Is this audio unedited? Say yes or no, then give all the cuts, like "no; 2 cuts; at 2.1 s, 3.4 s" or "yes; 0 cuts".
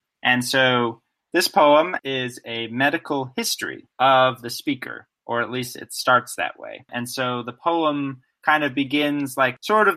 no; 1 cut; at 2.0 s